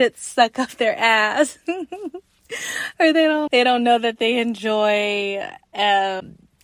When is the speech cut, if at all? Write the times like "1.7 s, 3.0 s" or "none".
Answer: 3.5 s